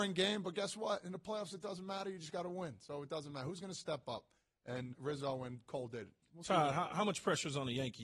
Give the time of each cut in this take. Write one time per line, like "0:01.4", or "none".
0:04.9